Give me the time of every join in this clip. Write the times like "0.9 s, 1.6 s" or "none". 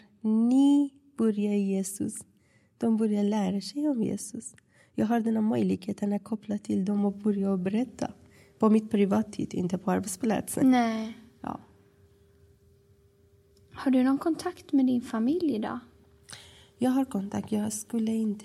none